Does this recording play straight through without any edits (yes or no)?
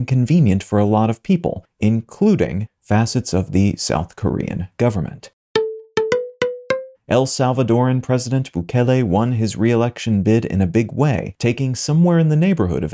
no